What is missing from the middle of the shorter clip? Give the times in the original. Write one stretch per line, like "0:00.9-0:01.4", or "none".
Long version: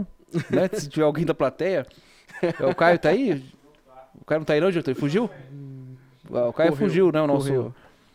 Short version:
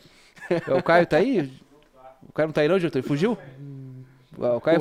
none